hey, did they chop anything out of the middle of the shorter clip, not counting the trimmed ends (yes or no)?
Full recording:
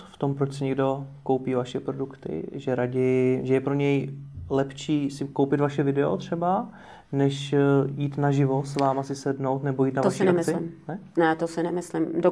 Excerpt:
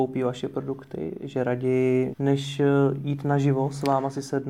yes